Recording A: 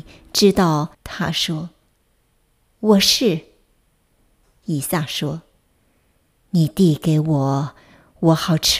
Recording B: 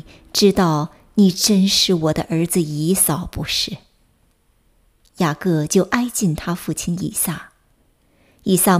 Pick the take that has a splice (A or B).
A